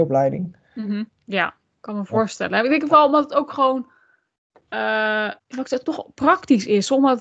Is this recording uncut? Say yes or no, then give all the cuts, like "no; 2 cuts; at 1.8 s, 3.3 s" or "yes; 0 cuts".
no; 2 cuts; at 1.1 s, 5.4 s